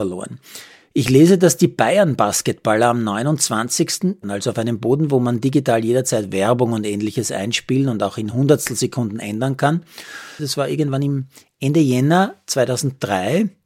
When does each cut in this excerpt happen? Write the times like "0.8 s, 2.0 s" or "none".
4.2 s, 10.4 s